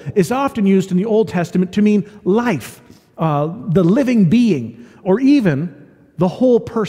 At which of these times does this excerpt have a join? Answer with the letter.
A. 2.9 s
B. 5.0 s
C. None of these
B